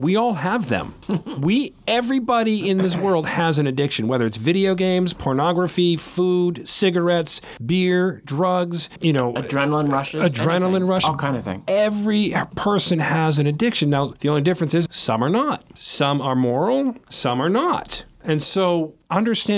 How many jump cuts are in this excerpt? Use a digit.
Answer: 2